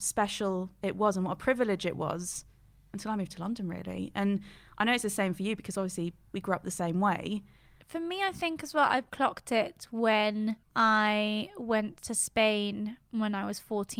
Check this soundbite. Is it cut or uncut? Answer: cut